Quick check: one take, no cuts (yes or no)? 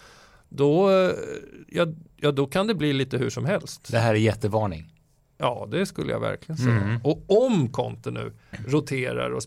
yes